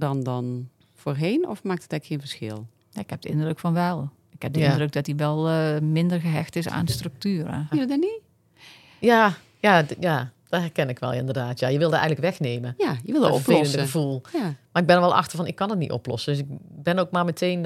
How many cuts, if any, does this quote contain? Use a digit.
1